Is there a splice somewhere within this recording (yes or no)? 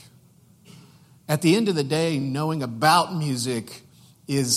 no